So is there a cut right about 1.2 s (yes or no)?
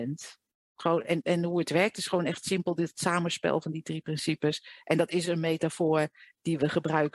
yes